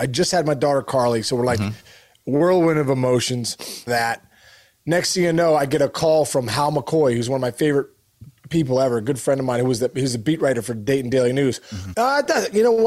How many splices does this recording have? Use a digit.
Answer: 2